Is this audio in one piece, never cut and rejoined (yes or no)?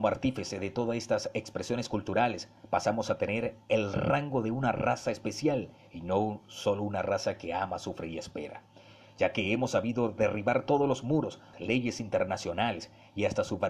no